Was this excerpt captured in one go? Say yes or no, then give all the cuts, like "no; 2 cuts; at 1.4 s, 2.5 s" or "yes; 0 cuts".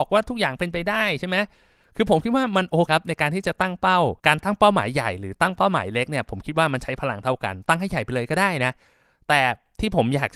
no; 2 cuts; at 2.9 s, 4.2 s